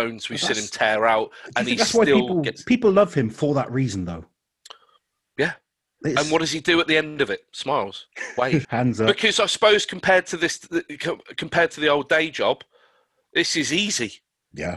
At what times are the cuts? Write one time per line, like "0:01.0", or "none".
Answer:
0:08.6